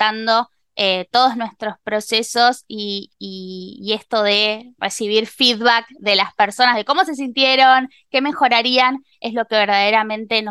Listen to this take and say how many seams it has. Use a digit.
0